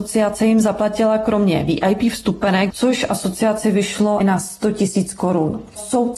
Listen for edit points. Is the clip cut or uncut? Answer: cut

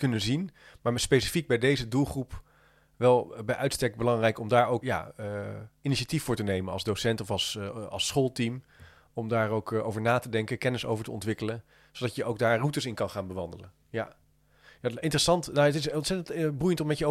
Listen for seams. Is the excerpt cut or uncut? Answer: cut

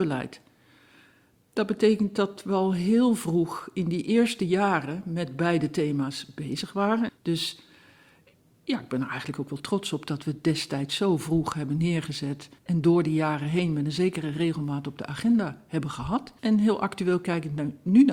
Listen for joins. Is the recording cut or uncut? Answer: cut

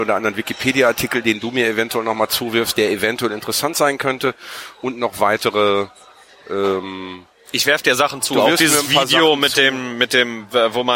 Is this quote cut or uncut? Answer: uncut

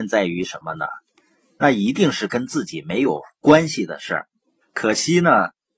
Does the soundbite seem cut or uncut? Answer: cut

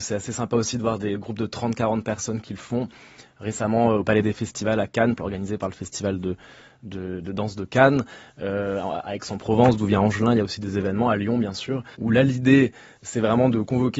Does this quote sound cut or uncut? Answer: cut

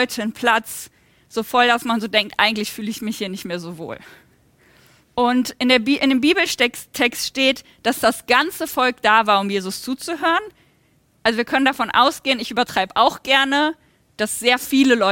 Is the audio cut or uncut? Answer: cut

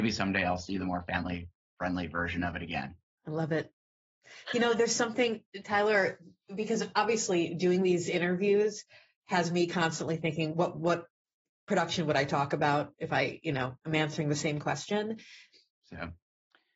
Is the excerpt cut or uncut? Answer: cut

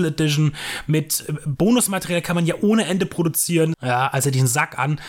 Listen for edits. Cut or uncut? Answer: cut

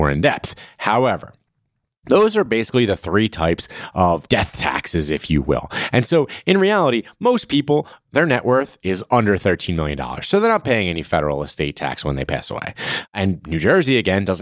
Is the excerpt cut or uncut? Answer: uncut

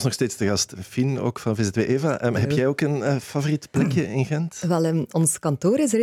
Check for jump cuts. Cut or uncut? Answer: uncut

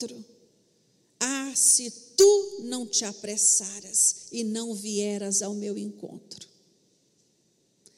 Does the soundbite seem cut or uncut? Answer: uncut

